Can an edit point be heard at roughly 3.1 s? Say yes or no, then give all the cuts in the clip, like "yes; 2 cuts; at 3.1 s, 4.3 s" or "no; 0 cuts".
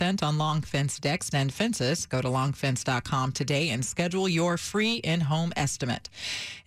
no; 1 cut; at 1.3 s